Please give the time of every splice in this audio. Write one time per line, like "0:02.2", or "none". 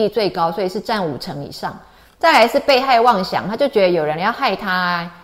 none